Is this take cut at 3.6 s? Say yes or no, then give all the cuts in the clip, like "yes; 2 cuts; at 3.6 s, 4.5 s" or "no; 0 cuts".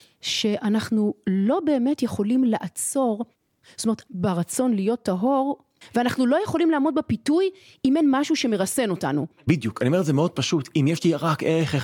no; 1 cut; at 5.8 s